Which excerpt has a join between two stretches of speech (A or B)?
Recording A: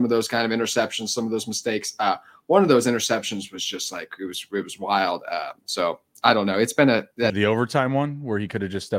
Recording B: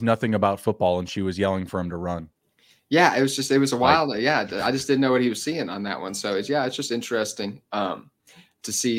A